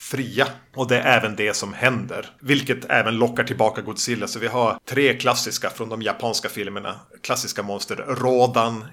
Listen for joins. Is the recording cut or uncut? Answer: uncut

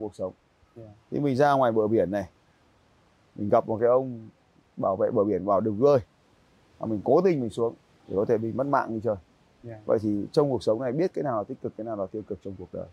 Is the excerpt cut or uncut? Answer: uncut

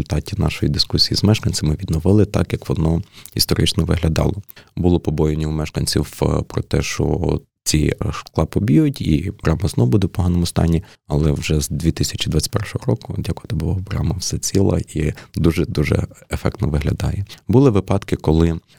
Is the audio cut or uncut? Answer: uncut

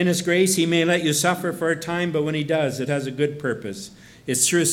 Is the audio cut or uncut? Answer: cut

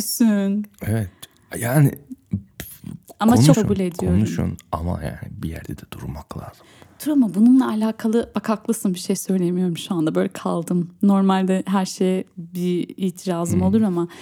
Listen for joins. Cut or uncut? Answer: cut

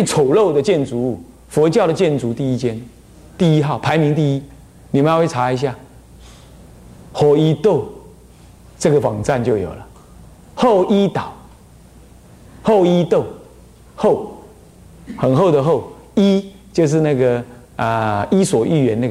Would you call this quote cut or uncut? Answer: uncut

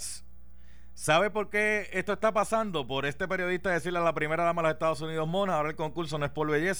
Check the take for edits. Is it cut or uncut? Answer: uncut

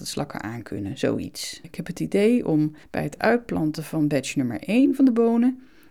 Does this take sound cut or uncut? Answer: cut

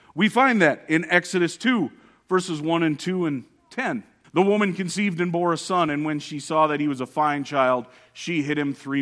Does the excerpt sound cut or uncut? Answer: cut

